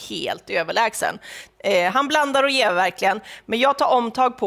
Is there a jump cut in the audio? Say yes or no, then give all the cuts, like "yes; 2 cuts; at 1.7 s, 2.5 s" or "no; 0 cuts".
no; 0 cuts